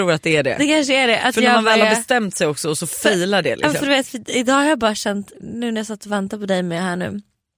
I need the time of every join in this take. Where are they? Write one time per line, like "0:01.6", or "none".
0:05.3